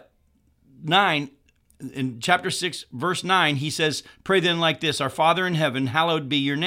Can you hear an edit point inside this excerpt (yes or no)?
no